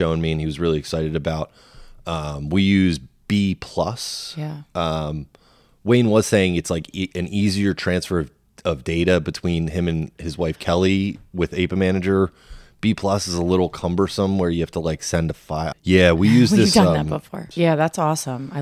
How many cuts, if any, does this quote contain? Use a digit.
2